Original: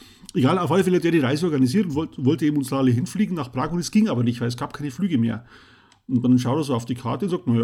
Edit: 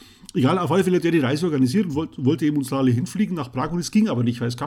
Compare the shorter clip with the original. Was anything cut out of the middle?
no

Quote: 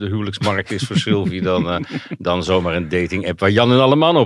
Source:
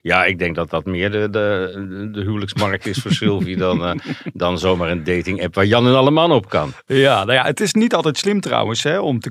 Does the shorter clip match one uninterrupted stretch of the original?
yes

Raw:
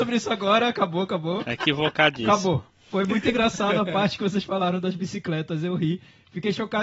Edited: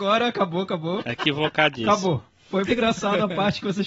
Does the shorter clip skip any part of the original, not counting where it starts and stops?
yes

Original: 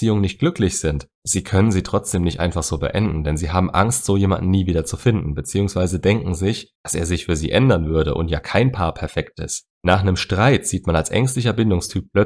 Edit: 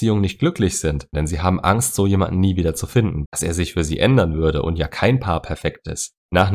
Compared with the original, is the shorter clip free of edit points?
no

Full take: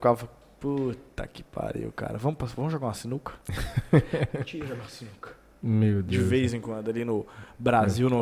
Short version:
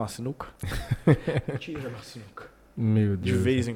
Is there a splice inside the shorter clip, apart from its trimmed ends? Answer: no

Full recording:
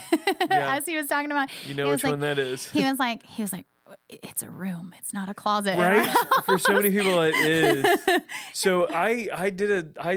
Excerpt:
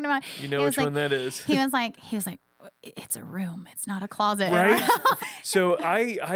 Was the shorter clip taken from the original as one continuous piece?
no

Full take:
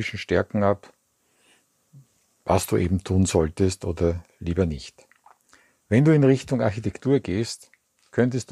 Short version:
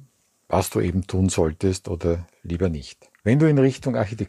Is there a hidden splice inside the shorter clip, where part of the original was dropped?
yes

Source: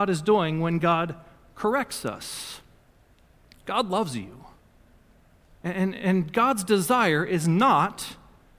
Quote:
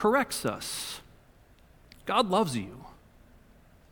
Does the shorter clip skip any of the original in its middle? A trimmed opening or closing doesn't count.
no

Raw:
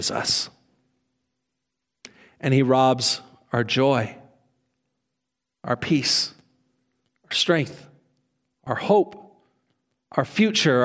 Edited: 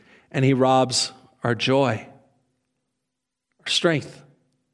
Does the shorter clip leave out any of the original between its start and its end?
yes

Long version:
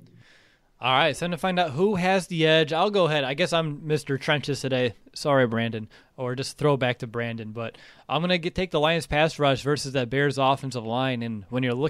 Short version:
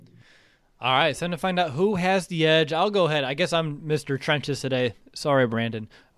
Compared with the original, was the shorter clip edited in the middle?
no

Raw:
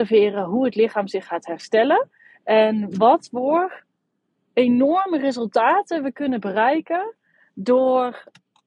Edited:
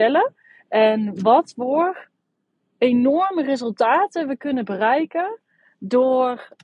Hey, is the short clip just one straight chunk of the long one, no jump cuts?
yes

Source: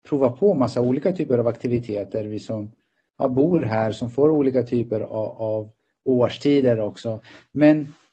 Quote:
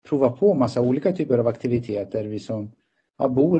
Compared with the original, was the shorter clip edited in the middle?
no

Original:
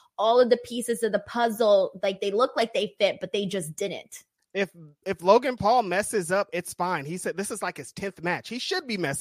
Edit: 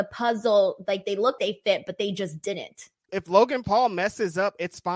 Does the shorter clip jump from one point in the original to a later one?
yes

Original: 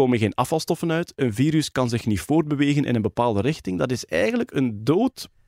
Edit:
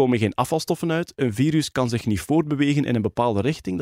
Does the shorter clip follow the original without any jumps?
yes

